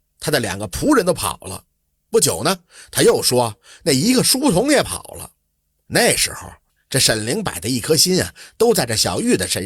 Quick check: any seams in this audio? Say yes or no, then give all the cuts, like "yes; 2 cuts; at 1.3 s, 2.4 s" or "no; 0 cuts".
no; 0 cuts